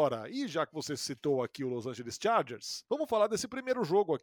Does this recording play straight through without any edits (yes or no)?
no